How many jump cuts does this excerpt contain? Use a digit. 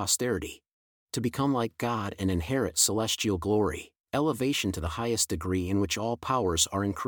2